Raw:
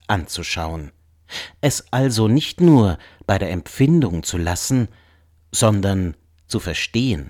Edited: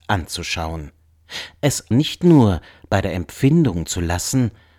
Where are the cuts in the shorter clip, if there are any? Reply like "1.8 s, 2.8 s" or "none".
1.9 s